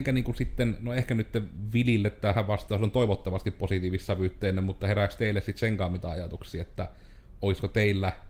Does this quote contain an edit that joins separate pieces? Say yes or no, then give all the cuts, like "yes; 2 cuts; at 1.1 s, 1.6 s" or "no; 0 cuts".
no; 0 cuts